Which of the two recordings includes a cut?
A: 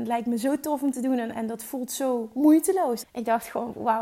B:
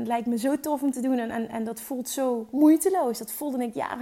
A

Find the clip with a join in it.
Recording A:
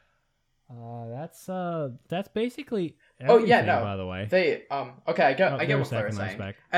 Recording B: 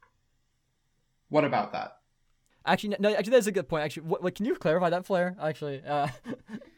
B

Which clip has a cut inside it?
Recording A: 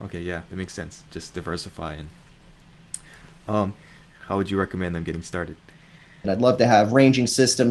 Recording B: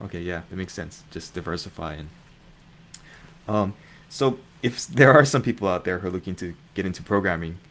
A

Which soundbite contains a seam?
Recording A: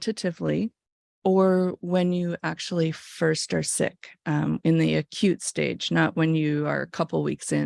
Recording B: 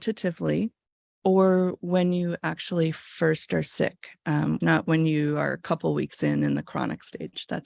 B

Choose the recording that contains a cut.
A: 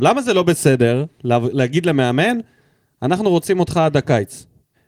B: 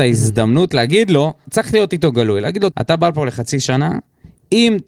B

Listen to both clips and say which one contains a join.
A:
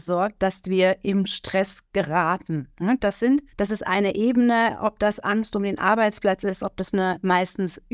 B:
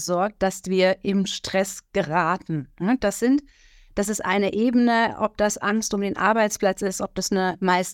A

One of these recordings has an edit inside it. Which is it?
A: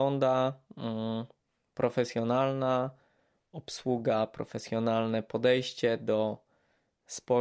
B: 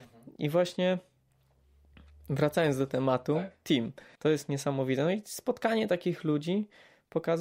B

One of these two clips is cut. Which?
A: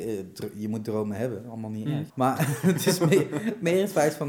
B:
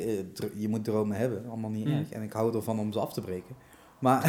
A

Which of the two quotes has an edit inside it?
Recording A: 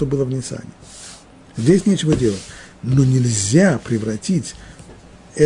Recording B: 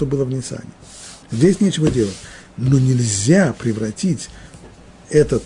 B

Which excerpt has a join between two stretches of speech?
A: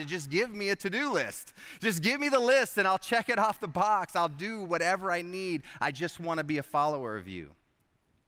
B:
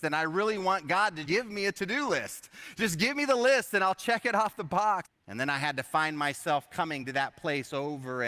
B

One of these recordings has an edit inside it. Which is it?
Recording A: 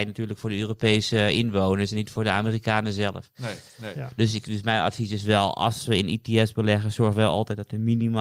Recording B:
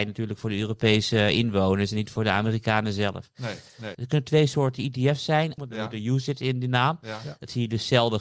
B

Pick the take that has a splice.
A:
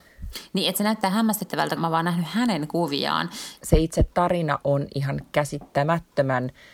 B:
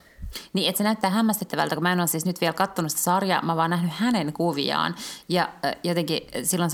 A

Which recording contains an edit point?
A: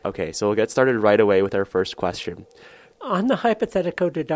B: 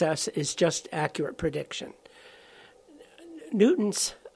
A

